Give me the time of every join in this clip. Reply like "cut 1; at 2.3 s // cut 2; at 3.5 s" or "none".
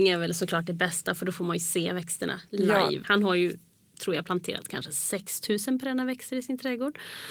cut 1; at 3.0 s